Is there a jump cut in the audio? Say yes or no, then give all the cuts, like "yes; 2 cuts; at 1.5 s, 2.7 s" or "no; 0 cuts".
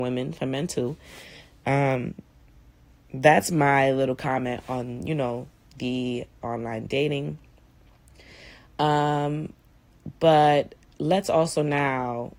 no; 0 cuts